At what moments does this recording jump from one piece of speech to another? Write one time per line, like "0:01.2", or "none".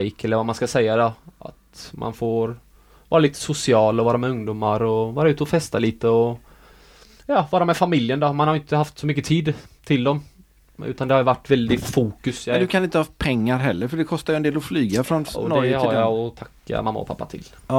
none